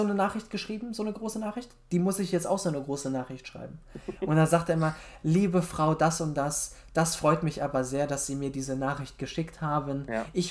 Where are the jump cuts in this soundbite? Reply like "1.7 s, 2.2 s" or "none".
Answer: none